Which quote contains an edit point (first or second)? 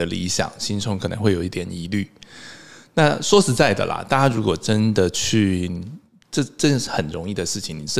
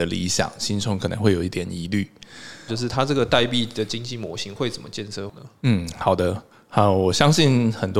second